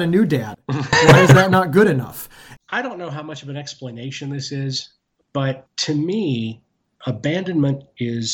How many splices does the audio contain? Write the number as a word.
one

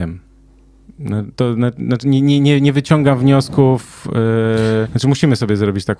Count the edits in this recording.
one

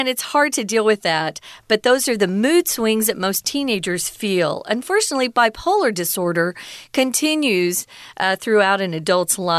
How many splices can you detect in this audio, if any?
zero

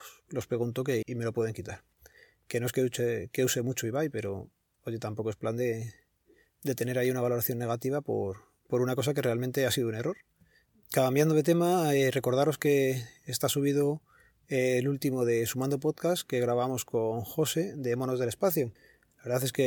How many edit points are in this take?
one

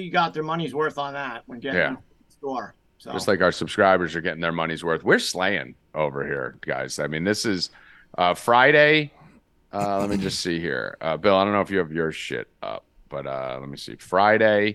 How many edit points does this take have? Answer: zero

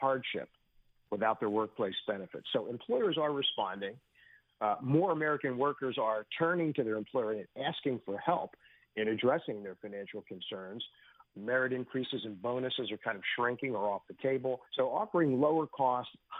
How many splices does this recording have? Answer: two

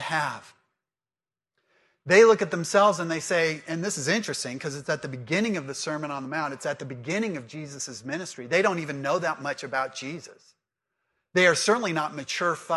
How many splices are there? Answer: zero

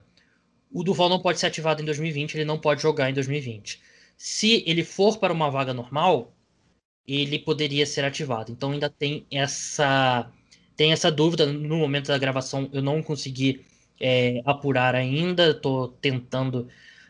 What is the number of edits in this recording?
zero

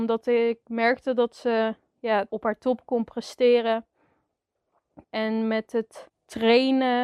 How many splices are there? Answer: two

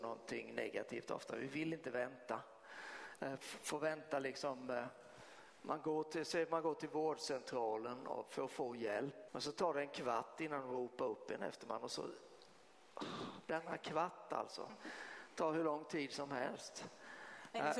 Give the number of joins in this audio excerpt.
two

